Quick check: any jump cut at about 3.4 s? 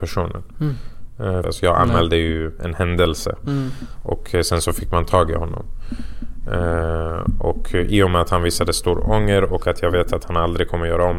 no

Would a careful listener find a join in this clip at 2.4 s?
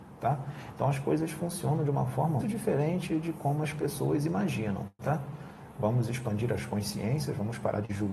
yes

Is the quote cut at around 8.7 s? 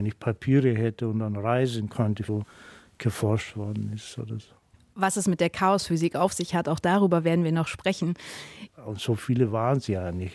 yes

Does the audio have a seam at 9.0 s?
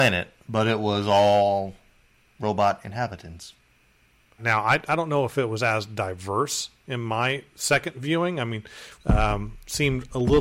yes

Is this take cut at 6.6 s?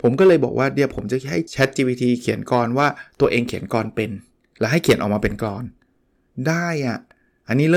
no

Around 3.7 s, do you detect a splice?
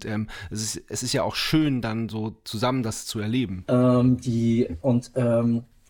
yes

